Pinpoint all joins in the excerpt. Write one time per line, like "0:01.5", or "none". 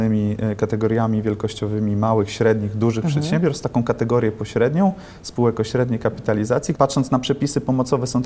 0:06.8